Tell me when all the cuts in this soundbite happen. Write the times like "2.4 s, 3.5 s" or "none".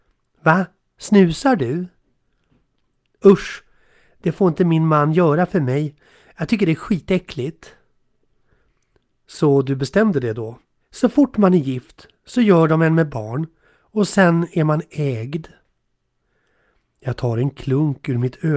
10.8 s